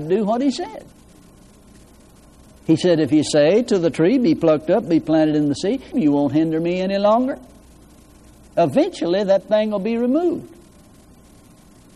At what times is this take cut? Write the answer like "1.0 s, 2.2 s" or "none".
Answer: 5.9 s